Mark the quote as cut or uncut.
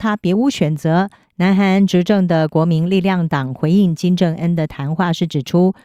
cut